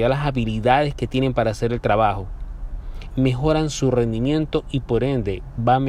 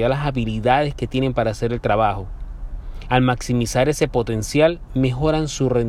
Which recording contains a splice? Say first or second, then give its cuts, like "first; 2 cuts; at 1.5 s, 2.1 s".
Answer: first; 1 cut; at 3.1 s